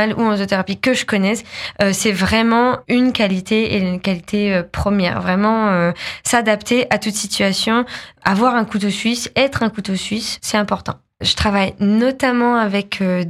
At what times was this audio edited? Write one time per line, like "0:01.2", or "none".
0:11.2